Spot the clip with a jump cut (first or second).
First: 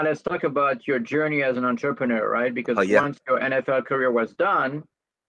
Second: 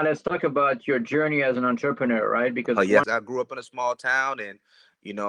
second